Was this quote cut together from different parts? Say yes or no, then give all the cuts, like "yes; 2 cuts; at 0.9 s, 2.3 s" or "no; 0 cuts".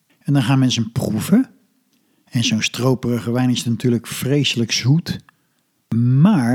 no; 0 cuts